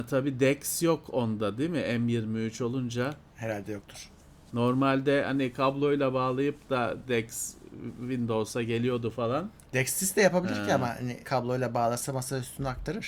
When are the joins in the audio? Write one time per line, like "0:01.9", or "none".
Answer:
0:11.2